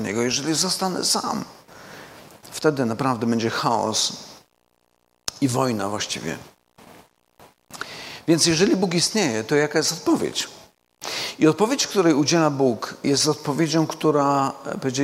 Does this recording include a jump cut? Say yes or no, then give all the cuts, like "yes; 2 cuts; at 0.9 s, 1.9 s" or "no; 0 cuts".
no; 0 cuts